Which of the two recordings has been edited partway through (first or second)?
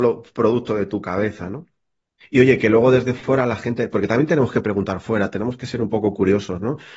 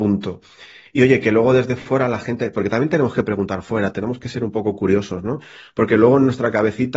first